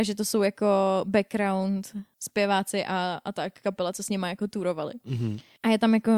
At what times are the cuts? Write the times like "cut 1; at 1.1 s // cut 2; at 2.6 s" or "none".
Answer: none